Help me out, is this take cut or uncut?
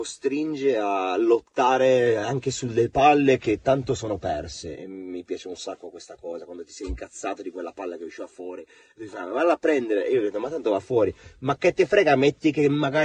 uncut